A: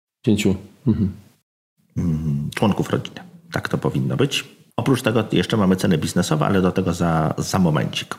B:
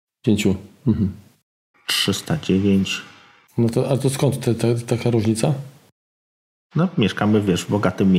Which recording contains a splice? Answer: B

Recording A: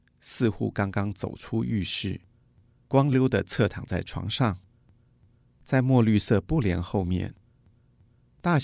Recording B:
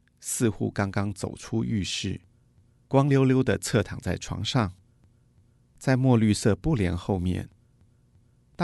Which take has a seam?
A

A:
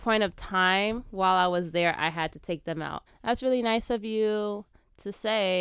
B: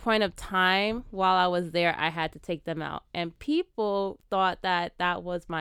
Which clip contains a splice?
A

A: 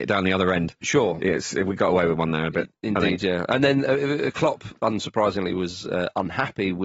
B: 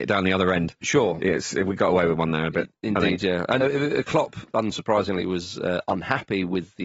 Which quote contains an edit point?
B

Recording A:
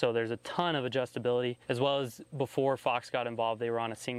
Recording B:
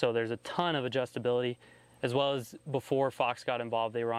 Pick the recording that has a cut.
A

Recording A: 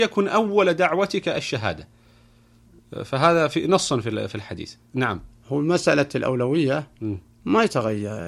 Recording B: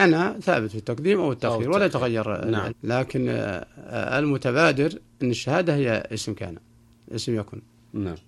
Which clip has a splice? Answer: B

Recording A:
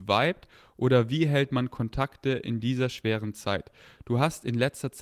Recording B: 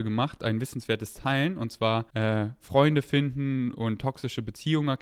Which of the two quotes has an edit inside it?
B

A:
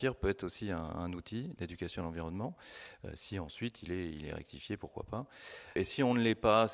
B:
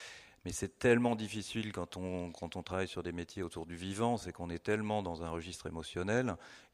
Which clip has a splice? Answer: A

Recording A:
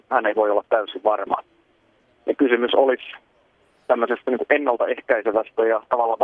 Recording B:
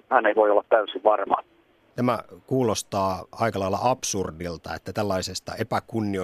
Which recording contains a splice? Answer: B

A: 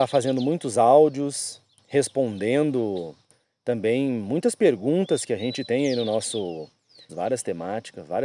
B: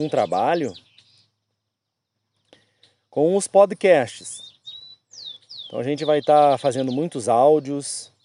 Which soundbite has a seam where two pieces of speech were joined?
A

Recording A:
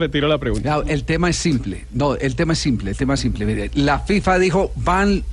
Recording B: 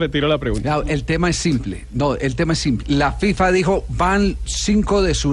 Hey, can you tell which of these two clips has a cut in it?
B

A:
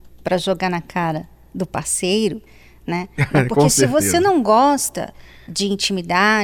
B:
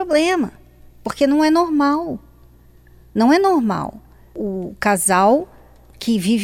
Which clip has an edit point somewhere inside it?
A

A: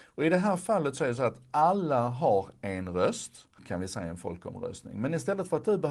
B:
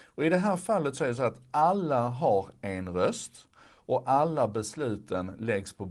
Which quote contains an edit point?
A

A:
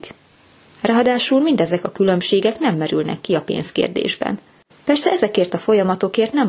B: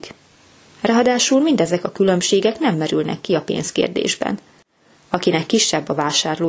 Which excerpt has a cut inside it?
A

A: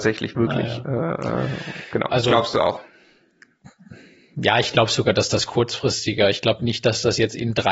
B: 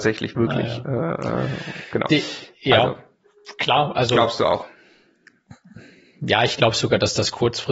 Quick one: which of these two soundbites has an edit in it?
A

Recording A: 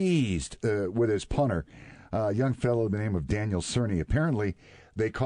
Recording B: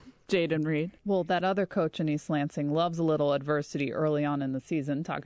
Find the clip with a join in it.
B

